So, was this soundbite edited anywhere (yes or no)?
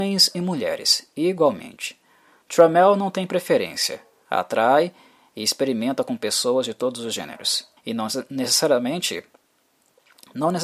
yes